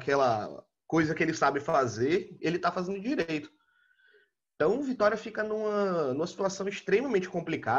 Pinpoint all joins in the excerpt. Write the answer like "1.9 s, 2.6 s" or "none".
2.4 s